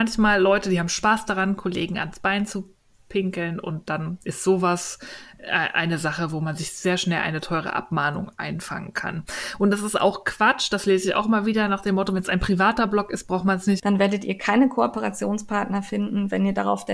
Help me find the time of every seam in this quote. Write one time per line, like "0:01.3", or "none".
0:13.8